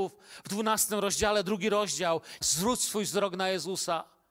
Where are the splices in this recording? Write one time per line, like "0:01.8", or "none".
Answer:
0:02.4